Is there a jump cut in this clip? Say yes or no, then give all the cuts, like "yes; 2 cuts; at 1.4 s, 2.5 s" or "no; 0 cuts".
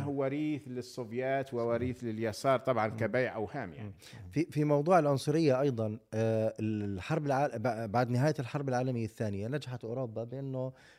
no; 0 cuts